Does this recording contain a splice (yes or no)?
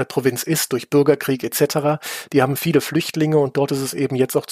no